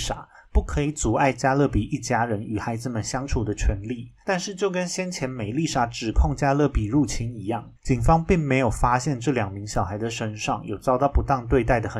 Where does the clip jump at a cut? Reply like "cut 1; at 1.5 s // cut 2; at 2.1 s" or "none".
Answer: cut 1; at 4.2 s // cut 2; at 7.8 s

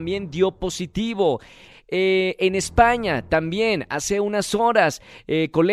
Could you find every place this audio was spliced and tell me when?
cut 1; at 1.7 s

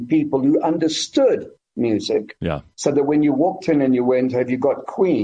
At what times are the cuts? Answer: none

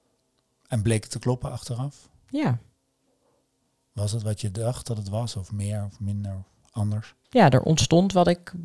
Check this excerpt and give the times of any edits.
none

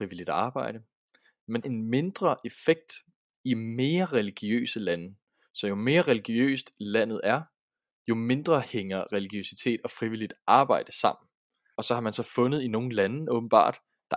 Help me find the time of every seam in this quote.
cut 1; at 1.6 s // cut 2; at 11.7 s

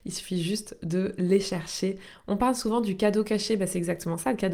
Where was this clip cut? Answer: none

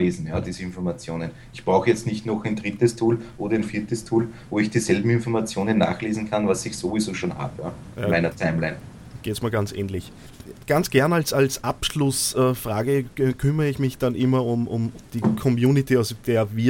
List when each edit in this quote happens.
none

